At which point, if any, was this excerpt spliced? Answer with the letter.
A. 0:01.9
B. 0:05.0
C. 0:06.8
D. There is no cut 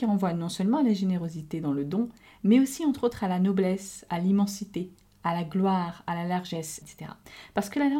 C